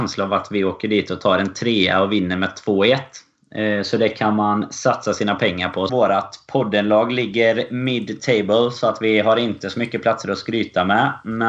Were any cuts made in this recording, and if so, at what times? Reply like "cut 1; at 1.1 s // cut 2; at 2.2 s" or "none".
cut 1; at 5.9 s